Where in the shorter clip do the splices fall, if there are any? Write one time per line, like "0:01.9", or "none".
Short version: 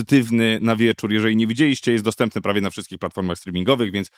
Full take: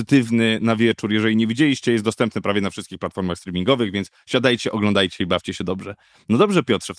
none